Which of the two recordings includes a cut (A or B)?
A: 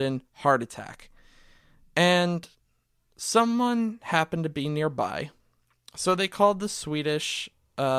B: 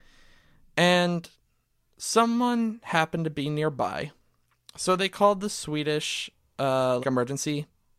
B